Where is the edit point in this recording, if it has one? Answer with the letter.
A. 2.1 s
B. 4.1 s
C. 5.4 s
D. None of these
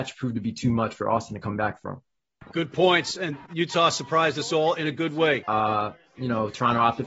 C